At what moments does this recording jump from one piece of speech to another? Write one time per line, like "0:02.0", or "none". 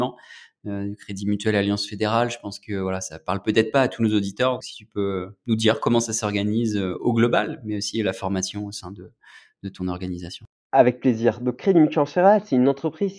0:04.6